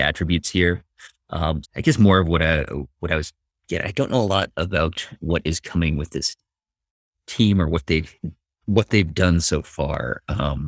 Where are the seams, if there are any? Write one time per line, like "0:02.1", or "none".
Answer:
0:01.6